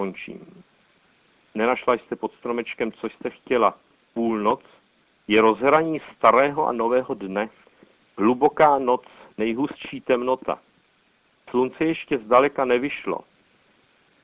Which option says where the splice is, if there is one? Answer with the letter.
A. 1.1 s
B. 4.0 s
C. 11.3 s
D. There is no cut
B